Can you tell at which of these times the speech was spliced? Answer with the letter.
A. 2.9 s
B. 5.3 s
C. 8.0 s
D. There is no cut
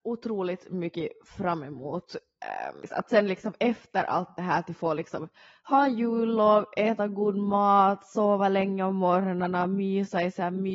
D